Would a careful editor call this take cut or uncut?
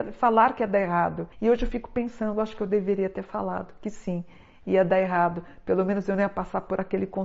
cut